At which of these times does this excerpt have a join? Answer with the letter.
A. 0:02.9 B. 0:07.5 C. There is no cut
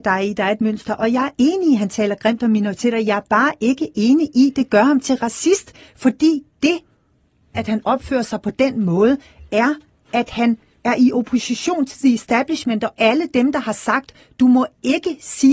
B